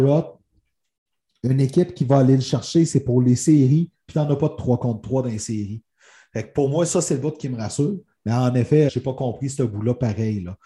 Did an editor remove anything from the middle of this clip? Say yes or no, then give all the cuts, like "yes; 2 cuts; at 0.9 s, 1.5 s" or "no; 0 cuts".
yes; 1 cut; at 8.9 s